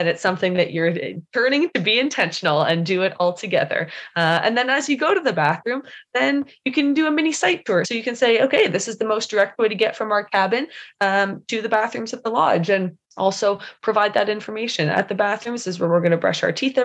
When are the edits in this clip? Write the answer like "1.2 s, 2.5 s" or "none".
7.8 s, 13.0 s